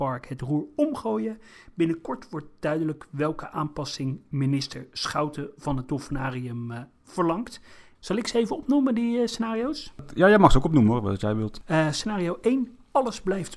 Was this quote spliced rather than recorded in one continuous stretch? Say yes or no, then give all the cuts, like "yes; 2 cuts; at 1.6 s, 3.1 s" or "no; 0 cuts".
yes; 1 cut; at 8.0 s